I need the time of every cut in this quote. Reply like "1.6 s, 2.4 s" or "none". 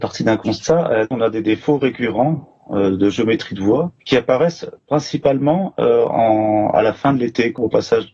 4.0 s